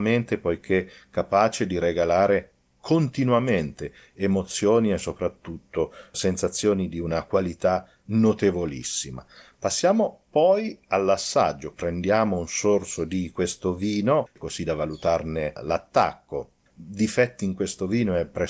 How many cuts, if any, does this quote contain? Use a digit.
2